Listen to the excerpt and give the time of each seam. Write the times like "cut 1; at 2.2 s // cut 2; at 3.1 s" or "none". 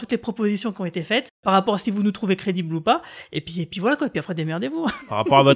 none

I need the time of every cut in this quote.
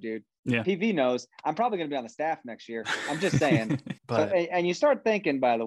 cut 1; at 4.0 s

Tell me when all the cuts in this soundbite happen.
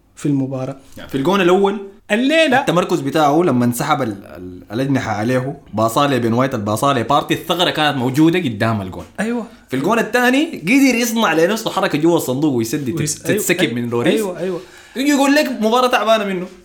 cut 1; at 2.0 s

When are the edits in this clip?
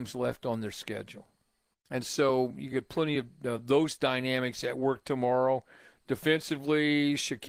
cut 1; at 1.7 s

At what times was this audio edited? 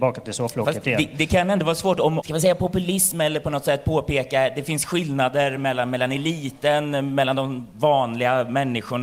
cut 1; at 2.2 s

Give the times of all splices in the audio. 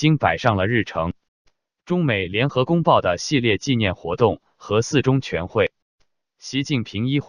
none

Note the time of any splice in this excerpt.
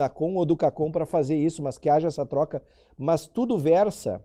none

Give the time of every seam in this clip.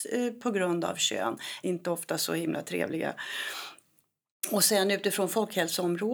cut 1; at 1.6 s

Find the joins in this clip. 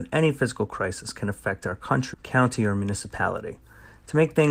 cut 1; at 2.1 s

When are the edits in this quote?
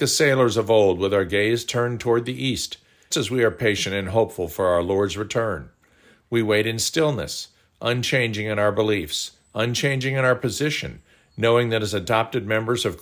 cut 1; at 3.1 s

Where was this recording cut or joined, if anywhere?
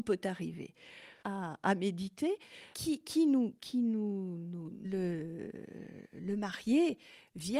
cut 1; at 1.2 s // cut 2; at 2.7 s // cut 3; at 4.8 s

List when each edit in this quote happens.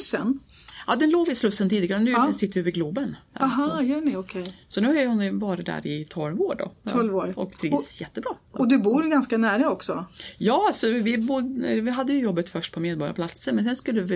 none

